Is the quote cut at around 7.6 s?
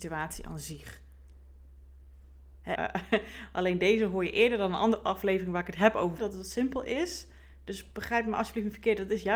no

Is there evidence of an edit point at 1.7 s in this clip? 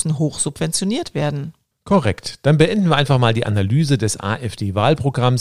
yes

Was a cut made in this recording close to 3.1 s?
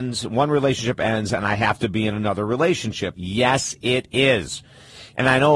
yes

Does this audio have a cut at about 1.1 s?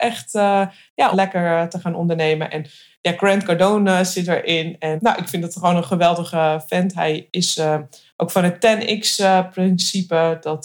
yes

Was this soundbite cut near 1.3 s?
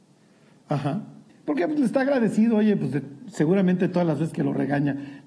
yes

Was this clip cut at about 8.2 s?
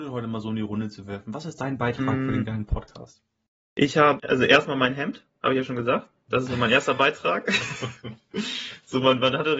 no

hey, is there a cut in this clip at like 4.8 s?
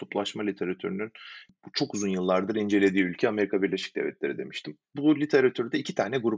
no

